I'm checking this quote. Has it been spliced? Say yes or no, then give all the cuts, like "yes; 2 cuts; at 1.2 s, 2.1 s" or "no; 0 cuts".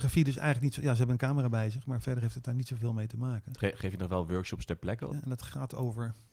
yes; 1 cut; at 5.1 s